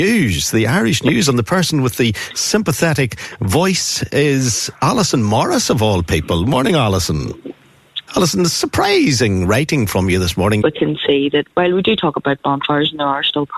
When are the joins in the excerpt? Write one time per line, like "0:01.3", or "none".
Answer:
0:08.1
0:10.6